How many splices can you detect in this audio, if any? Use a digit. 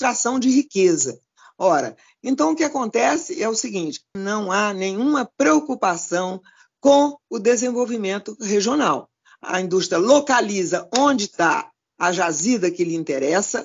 1